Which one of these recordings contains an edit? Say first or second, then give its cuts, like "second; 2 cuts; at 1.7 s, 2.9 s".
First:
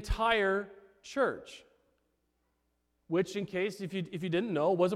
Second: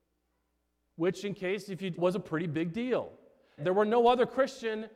second; 2 cuts; at 2.0 s, 3.6 s